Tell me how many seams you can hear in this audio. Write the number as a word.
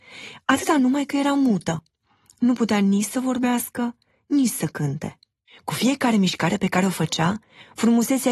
one